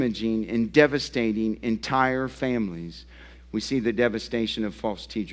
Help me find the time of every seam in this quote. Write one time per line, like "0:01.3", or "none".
0:03.4